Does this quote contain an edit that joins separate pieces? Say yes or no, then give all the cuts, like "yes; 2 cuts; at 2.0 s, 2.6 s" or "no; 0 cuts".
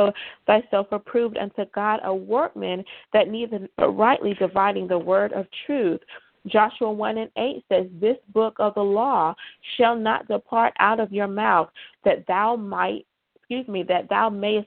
yes; 2 cuts; at 3.7 s, 11.9 s